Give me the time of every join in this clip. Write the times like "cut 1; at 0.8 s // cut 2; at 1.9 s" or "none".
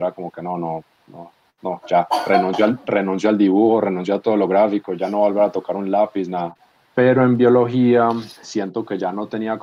cut 1; at 6.9 s // cut 2; at 8.4 s